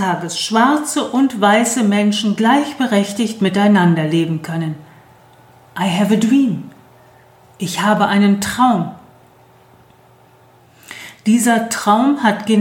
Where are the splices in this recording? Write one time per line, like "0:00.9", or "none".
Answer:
none